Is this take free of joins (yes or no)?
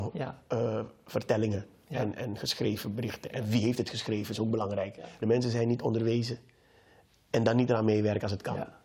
no